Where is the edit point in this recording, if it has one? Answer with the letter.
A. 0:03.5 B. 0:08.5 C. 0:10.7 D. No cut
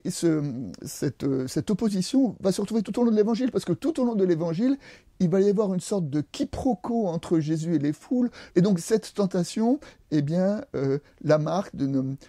B